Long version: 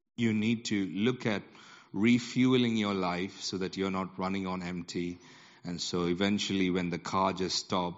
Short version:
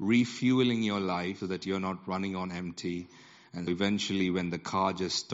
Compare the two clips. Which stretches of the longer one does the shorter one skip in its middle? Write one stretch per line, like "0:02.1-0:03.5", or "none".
0:03.3-0:03.5
0:05.8-0:06.1